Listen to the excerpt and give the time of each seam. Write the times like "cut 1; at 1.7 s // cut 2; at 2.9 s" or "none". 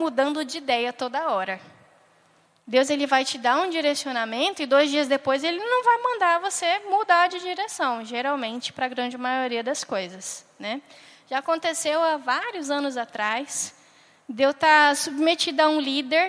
none